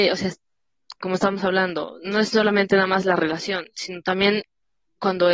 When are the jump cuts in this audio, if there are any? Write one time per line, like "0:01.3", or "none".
none